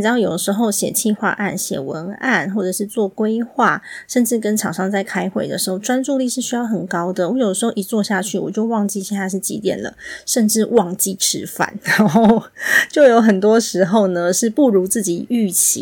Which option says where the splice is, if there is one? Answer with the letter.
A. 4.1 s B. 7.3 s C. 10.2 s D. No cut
D